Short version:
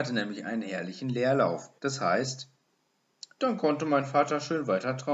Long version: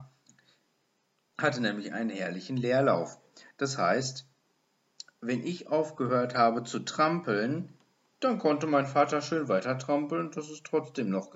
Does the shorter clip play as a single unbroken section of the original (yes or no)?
no